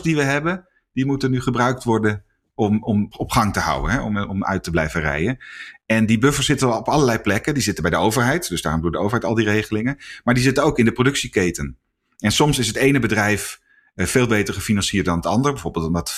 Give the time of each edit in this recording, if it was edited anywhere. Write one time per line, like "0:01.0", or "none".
0:03.1